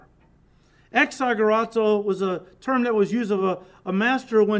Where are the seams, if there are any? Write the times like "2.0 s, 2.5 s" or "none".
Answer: none